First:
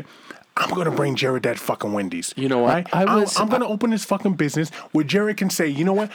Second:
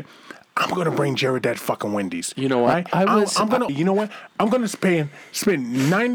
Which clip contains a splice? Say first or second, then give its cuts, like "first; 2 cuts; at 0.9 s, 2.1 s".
second; 1 cut; at 3.7 s